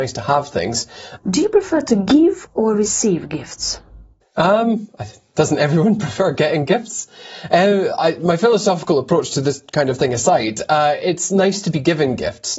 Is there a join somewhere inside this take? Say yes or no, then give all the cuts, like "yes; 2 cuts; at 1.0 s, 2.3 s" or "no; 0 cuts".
yes; 1 cut; at 1.2 s